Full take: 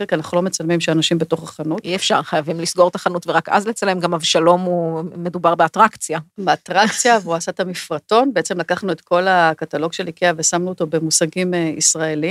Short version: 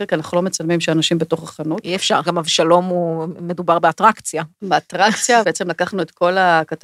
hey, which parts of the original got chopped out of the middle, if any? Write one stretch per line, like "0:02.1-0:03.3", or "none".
0:02.2-0:04.0
0:07.2-0:08.3